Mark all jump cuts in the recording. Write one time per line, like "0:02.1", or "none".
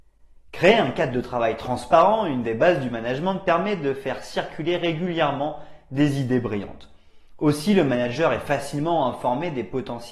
none